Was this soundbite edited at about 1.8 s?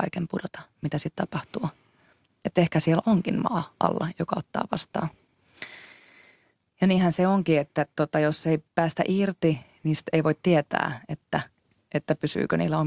no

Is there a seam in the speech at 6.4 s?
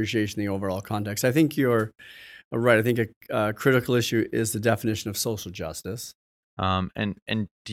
yes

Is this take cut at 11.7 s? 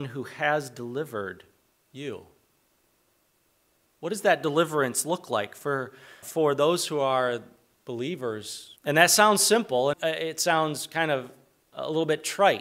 no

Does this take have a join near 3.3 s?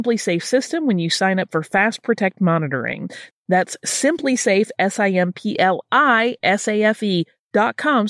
yes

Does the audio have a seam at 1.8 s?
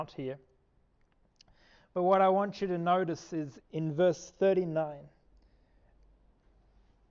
no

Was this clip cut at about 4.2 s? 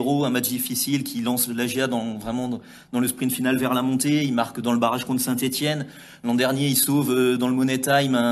no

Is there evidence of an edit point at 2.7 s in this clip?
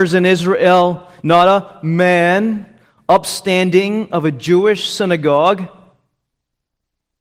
no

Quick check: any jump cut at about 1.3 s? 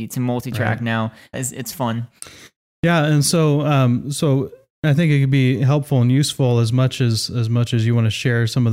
yes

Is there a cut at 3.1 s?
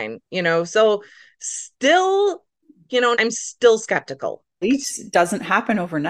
yes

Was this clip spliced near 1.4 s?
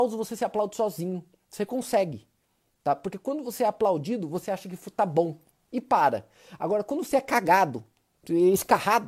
no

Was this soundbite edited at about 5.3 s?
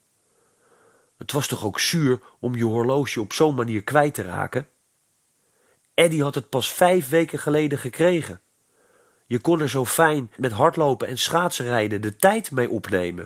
no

